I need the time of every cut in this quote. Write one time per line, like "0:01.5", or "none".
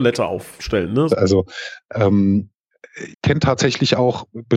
0:01.1
0:03.1

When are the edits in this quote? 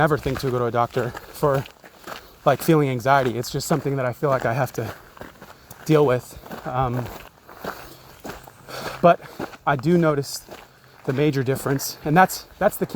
none

